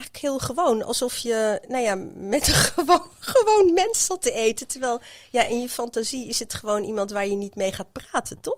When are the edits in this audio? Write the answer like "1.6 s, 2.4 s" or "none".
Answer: none